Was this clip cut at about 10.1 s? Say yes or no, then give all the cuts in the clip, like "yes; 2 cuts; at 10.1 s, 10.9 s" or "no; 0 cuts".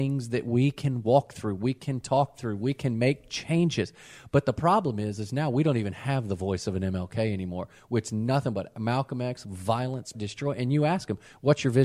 yes; 1 cut; at 10.1 s